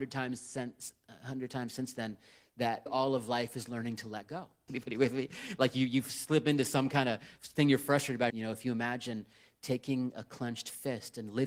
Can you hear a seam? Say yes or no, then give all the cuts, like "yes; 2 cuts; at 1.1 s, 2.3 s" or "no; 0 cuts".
yes; 3 cuts; at 2.9 s, 4.7 s, 8.3 s